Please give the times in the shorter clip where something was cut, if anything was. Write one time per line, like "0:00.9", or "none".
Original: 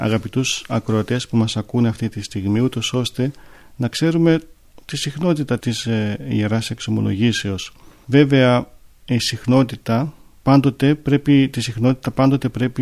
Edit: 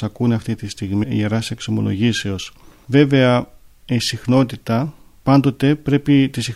0:01.0